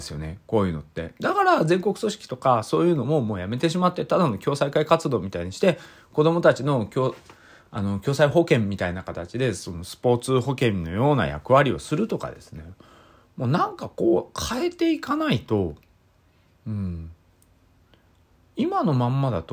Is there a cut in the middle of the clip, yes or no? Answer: no